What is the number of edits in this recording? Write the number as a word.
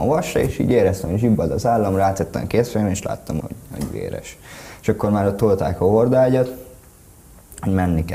one